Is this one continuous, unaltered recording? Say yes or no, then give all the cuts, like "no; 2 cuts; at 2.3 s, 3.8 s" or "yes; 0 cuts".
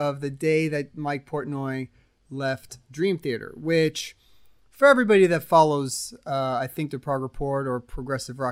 yes; 0 cuts